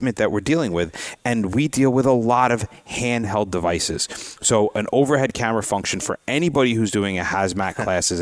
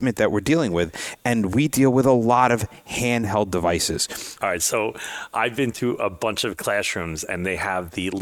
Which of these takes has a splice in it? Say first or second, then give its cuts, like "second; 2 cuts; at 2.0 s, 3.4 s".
second; 1 cut; at 4.4 s